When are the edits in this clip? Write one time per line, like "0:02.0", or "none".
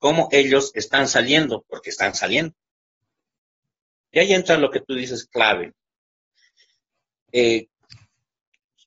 0:04.0

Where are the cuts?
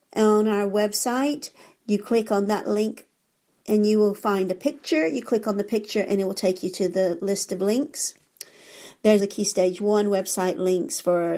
0:09.2

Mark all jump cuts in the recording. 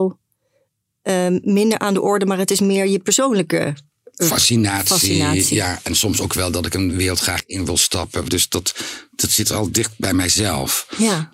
0:08.3

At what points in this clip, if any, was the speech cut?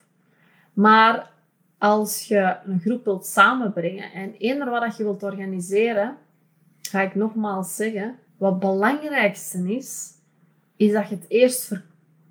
0:08.3

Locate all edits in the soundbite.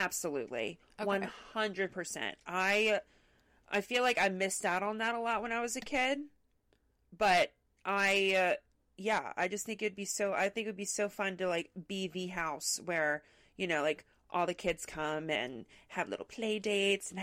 none

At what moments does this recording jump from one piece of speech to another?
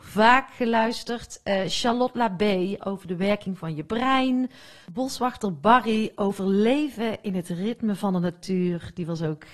0:04.8

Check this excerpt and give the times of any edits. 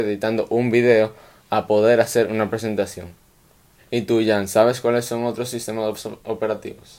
0:03.8

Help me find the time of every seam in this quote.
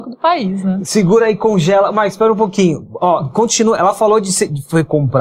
none

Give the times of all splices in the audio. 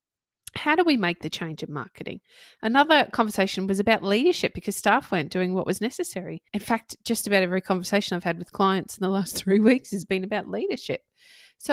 0:06.5

